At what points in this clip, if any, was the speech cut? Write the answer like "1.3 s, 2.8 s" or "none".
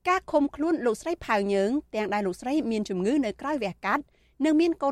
none